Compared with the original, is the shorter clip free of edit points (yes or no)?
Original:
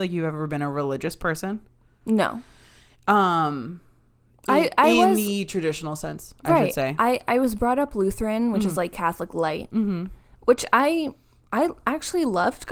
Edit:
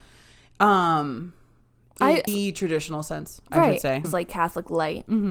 no